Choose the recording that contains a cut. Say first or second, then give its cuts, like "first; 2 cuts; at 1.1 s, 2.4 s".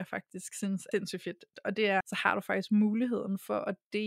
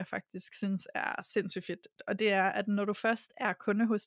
first; 2 cuts; at 0.9 s, 2.0 s